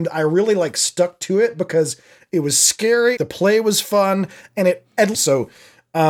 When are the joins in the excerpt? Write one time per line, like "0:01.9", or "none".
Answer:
0:03.2
0:05.1